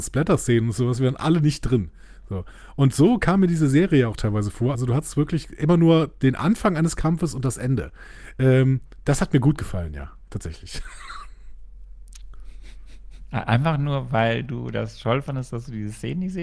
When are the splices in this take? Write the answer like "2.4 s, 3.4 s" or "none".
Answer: none